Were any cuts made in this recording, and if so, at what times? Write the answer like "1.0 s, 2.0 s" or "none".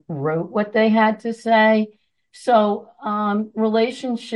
none